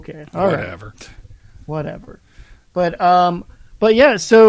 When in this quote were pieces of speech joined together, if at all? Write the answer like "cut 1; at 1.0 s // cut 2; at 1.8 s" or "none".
none